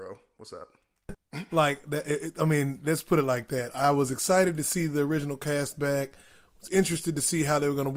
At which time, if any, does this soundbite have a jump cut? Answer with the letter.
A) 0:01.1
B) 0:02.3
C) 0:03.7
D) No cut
A